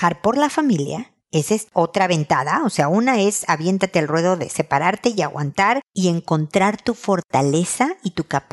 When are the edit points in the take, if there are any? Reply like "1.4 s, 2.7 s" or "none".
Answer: none